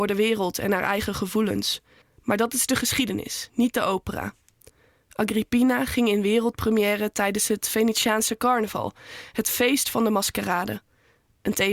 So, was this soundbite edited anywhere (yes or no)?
yes